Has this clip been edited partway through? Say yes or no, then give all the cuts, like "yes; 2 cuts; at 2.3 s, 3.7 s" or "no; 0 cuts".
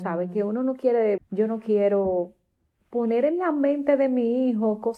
yes; 1 cut; at 1.2 s